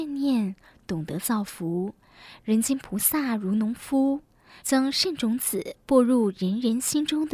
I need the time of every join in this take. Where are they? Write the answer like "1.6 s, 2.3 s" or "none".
2.4 s, 4.6 s